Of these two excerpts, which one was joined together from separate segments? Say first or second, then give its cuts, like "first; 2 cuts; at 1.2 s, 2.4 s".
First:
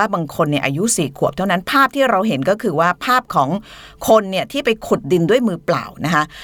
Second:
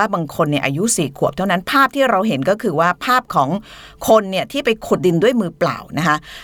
second; 1 cut; at 5.0 s